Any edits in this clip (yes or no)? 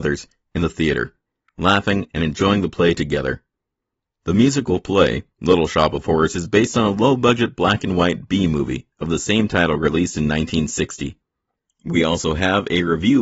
yes